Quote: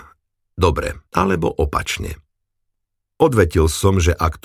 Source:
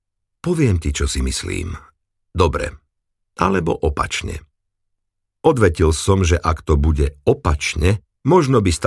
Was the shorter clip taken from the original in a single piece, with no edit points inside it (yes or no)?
no